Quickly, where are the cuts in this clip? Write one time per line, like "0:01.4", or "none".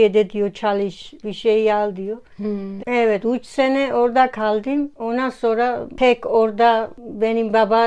0:01.2
0:02.8